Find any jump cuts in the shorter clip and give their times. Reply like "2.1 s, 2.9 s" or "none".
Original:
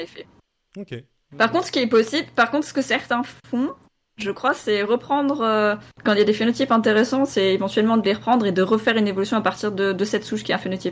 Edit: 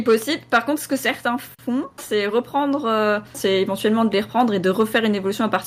2.0 s, 3.3 s